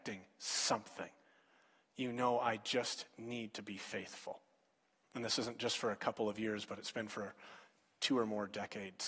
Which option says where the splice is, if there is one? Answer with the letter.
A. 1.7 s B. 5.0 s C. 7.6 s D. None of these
B